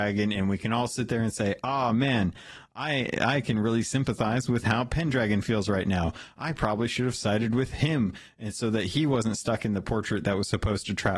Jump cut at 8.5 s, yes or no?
no